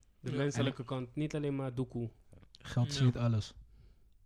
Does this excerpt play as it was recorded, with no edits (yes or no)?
yes